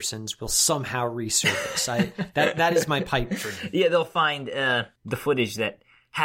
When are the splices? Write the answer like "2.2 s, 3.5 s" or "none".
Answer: 5.0 s